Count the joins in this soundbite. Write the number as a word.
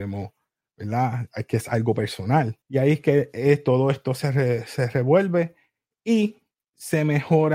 one